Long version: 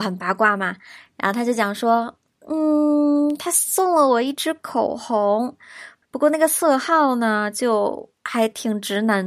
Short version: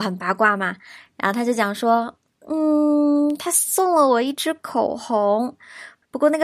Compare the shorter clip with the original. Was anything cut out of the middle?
no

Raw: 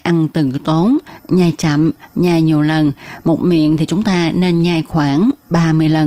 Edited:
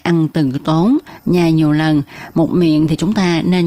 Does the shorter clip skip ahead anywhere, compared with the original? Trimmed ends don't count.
yes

